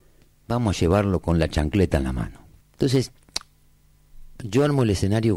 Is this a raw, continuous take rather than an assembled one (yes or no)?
no